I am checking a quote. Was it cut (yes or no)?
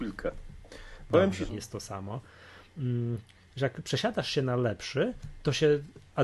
yes